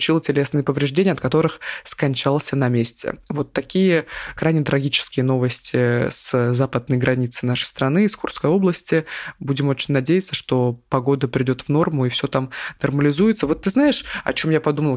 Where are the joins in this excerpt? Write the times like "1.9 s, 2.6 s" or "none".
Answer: none